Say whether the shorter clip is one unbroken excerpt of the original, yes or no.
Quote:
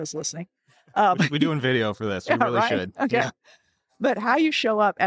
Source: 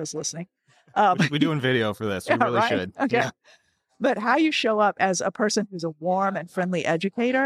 yes